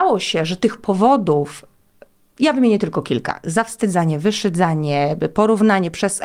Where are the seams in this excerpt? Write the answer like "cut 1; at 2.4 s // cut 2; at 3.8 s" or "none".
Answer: none